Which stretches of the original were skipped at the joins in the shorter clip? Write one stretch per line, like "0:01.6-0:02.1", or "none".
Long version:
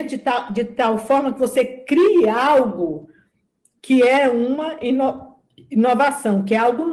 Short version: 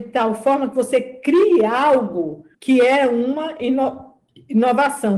0:03.2-0:03.8